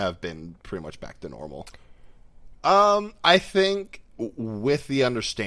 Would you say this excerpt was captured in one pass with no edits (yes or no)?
no